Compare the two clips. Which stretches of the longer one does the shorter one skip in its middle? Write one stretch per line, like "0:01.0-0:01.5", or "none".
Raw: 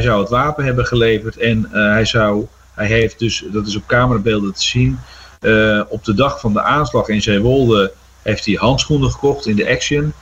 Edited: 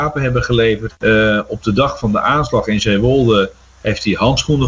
0:01.3-0:05.3

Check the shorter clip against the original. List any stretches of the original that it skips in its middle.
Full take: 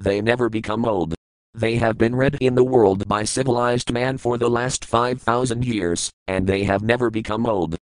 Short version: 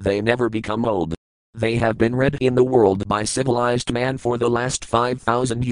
none

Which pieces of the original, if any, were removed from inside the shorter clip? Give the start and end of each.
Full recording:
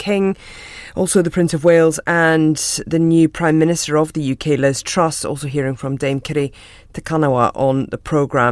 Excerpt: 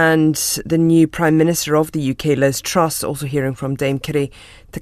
none

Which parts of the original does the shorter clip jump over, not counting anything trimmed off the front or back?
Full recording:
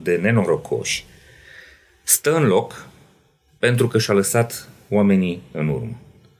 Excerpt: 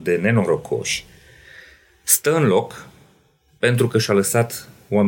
none

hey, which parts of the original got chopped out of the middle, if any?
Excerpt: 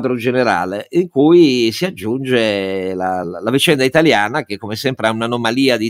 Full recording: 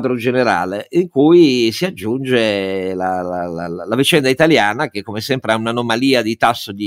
0:03.2-0:03.7

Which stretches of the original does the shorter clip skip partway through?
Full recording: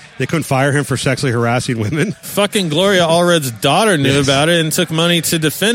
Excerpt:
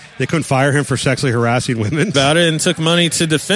0:02.1-0:04.3

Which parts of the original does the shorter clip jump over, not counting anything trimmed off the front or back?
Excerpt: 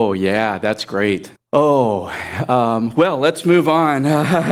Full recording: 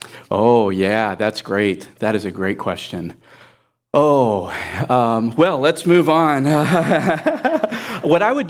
0:01.9-0:03.8

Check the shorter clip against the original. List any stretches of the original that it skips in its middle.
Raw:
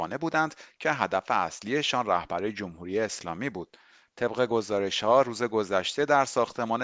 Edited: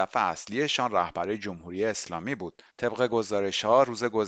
0:03.8-0:04.1

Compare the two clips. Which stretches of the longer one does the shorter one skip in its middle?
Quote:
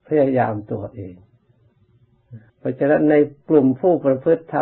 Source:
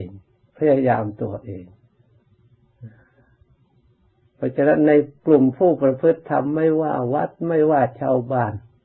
0:03.0-0:04.3

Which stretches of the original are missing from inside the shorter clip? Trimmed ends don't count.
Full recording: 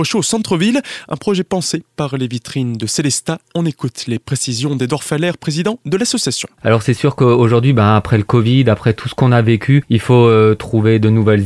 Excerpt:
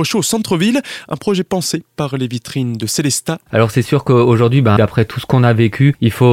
0:03.4-0:06.5
0:07.9-0:08.6

